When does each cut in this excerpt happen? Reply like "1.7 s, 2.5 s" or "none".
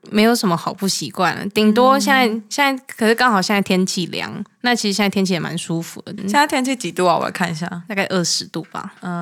6.2 s